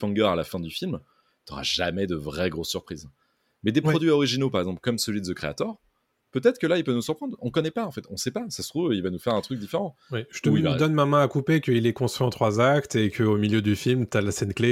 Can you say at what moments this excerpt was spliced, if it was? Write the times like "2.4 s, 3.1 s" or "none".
none